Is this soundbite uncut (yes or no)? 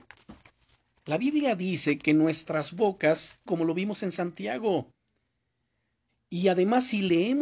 no